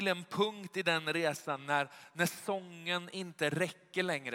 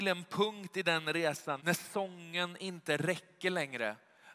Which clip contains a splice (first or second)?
second